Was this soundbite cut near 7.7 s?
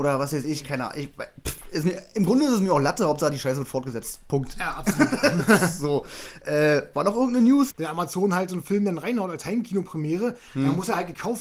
yes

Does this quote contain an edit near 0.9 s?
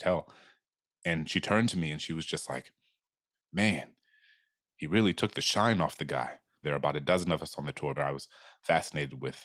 no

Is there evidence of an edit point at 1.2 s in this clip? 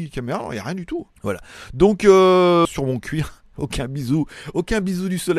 yes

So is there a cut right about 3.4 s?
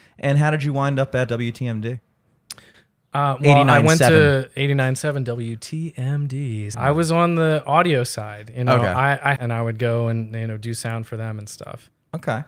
no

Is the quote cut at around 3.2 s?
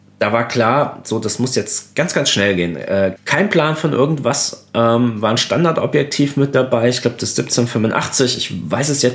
yes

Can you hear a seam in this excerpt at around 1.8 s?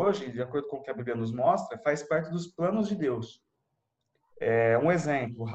no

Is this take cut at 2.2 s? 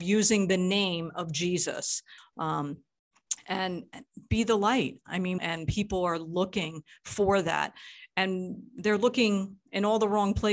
yes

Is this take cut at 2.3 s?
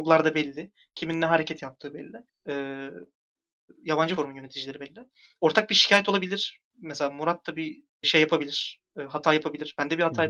yes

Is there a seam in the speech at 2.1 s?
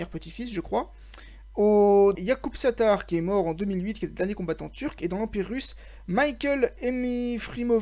yes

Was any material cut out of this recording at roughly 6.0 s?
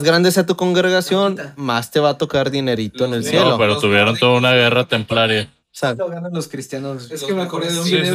yes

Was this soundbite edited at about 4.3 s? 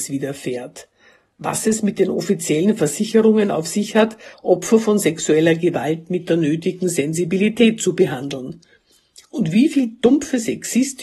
yes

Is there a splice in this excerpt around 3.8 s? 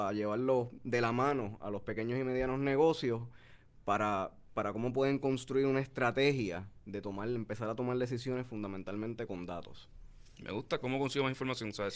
no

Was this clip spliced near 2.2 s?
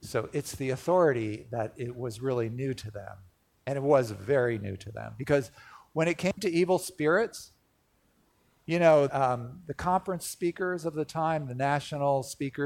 no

